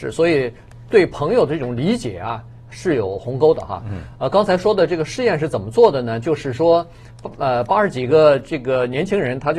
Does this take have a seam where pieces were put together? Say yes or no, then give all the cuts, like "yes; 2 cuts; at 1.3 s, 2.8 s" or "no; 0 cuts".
no; 0 cuts